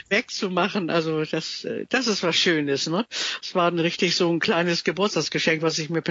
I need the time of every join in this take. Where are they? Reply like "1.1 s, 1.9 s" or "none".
none